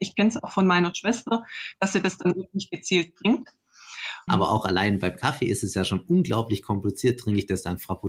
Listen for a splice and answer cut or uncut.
cut